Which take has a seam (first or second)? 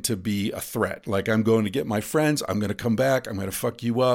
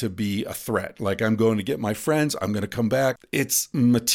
second